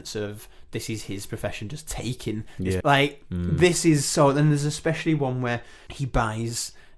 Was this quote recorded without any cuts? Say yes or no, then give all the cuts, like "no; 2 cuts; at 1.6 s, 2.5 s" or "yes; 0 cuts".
no; 2 cuts; at 2.8 s, 5.9 s